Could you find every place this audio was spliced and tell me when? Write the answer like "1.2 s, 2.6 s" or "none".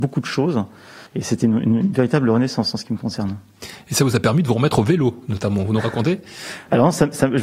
1.1 s